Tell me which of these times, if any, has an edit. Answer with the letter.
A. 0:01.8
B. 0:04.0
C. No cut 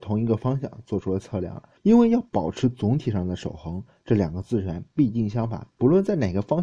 A